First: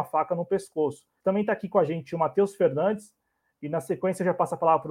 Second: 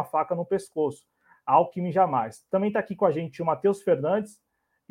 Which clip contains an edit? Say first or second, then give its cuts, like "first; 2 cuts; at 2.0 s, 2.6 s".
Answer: first; 1 cut; at 1.2 s